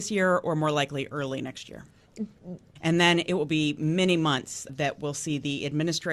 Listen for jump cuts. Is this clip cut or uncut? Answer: cut